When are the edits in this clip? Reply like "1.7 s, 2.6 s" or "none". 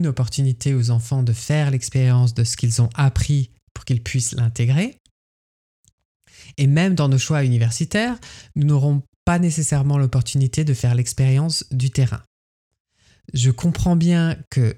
none